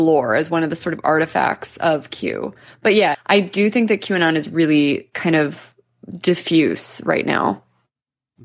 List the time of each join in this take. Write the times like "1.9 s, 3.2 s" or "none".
3.1 s